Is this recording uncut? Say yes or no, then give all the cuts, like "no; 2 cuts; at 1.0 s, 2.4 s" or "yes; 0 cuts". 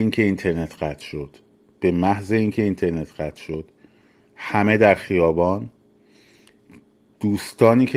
yes; 0 cuts